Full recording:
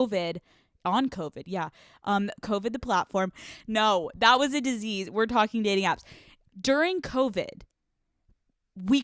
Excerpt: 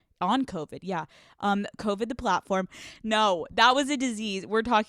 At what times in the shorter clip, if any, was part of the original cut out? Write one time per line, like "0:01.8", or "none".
none